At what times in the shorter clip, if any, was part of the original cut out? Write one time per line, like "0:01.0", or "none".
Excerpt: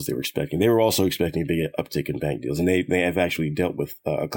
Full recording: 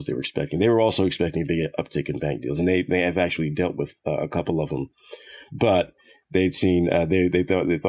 none